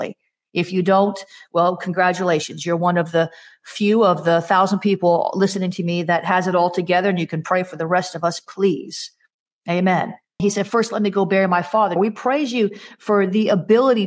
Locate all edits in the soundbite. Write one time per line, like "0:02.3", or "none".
0:10.4
0:12.0